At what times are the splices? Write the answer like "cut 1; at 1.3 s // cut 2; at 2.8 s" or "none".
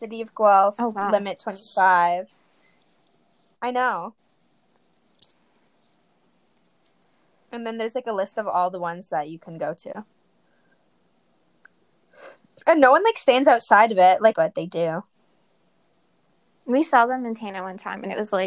cut 1; at 14.3 s